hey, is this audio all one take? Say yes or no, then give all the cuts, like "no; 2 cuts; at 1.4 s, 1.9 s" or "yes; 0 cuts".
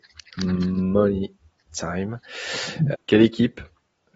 no; 1 cut; at 2.9 s